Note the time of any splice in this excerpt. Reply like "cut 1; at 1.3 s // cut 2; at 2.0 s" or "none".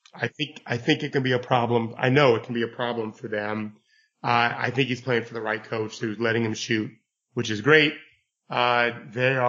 none